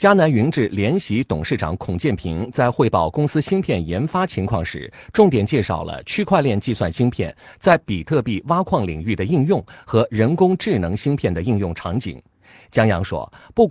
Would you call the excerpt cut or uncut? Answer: uncut